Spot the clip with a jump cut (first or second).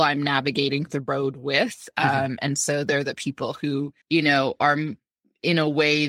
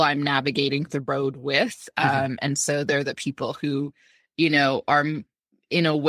first